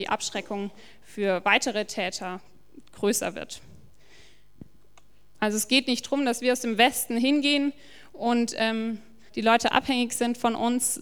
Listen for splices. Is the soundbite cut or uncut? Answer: cut